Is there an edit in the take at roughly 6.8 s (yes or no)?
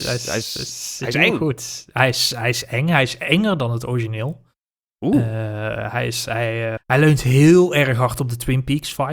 yes